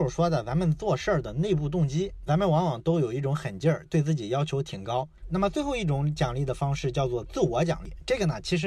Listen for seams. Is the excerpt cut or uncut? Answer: cut